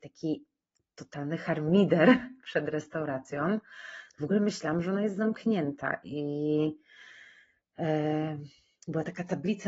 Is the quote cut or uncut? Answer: uncut